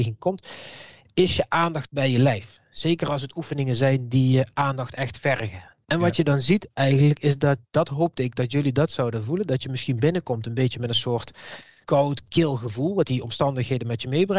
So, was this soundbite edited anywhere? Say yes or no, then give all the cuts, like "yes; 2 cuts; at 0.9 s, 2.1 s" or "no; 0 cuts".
no; 0 cuts